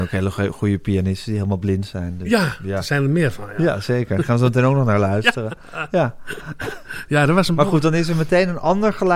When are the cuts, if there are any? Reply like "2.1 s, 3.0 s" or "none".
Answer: none